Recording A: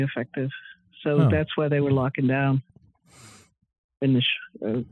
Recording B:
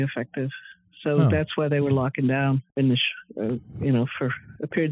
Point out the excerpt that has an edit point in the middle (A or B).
B